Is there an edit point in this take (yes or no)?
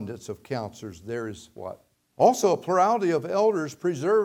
yes